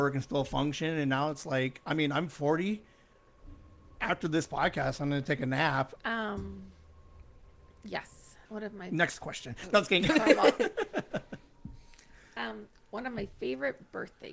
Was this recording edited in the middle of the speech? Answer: yes; 2 cuts; at 6.0 s, 8.4 s

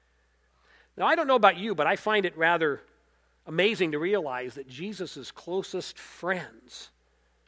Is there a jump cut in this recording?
no; 0 cuts

